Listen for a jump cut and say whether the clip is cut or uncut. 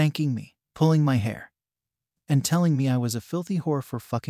uncut